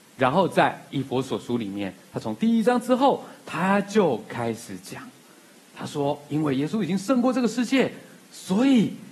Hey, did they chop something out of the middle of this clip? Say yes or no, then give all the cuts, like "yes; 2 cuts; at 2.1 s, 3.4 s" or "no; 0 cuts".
no; 0 cuts